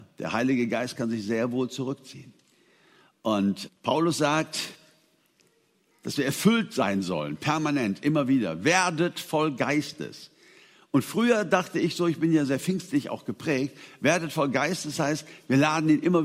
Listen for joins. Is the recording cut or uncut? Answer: cut